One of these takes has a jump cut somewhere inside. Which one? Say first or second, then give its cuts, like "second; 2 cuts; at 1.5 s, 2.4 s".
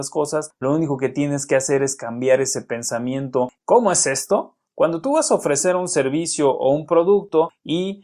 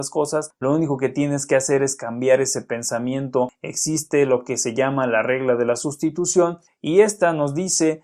first; 1 cut; at 3.6 s